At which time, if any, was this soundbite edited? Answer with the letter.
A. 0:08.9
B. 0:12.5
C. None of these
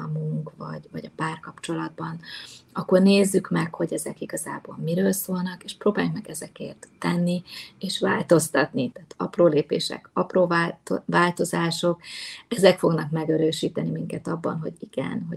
A